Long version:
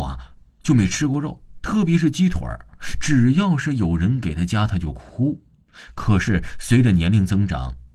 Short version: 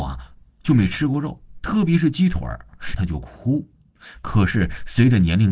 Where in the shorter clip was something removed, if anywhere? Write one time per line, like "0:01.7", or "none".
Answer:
0:03.0